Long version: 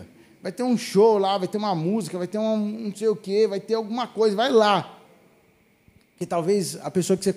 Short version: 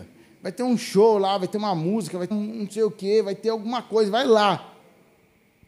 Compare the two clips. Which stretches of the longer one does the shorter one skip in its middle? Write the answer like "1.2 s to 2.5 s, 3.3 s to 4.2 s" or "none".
2.3 s to 2.6 s